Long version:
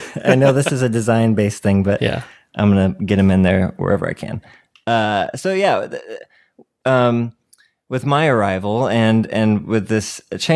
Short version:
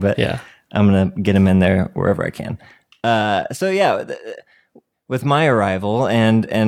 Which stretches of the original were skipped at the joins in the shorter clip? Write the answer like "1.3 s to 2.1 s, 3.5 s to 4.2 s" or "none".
6.8 s to 7.7 s